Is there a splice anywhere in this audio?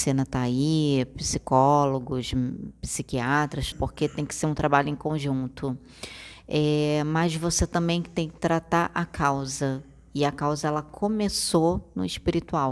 yes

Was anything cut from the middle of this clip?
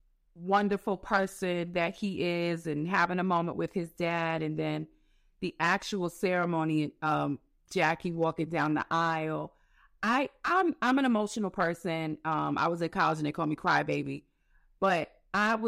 no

